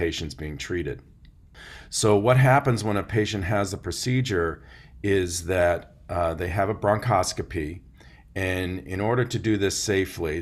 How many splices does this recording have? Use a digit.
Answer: 0